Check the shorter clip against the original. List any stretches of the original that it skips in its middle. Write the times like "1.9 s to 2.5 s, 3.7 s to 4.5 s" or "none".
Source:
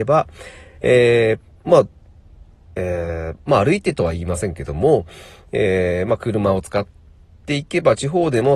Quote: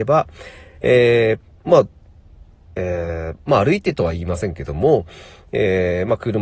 none